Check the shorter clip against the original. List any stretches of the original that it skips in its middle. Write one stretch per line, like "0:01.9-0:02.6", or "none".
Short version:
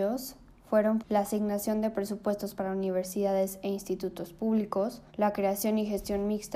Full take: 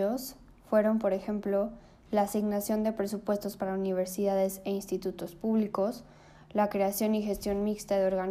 0:01.0-0:02.0
0:06.1-0:06.4